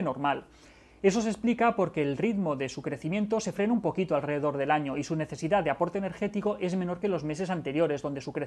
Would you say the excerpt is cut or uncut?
uncut